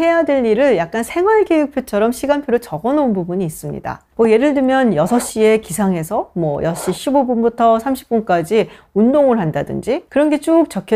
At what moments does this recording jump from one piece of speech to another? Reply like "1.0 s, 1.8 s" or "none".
none

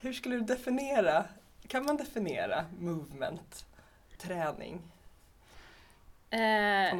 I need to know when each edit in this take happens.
none

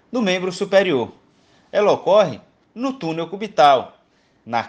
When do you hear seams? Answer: none

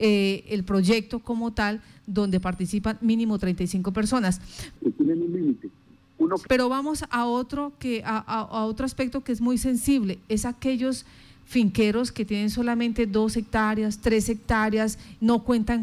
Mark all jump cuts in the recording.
4.8 s, 6.5 s

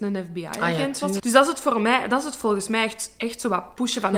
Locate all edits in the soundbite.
1.2 s

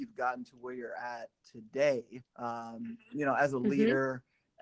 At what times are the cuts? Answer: 2.3 s

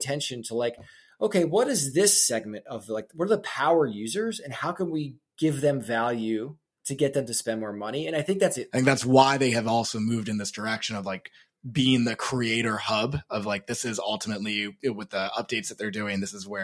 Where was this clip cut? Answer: 8.7 s

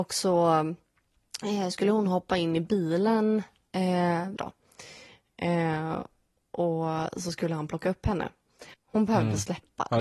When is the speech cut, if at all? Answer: 4.4 s, 8.7 s

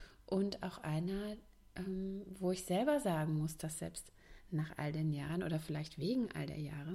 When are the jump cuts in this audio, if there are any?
none

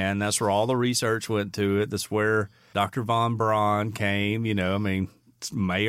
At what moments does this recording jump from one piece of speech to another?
none

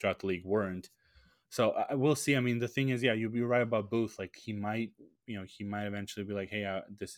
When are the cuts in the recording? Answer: none

